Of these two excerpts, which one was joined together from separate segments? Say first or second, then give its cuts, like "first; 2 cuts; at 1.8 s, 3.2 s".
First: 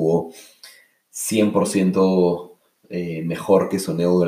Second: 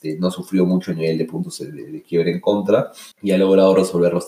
second; 1 cut; at 3.1 s